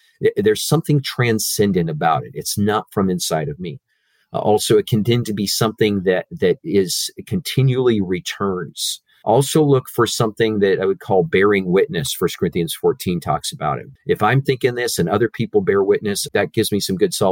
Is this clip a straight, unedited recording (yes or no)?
no